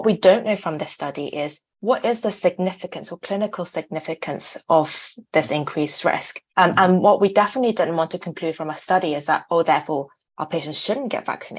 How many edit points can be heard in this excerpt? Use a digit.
2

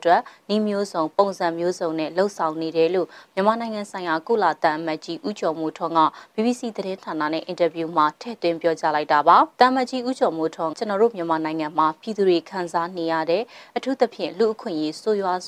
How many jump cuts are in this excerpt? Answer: 2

